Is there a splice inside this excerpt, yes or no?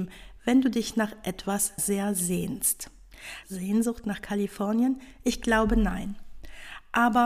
yes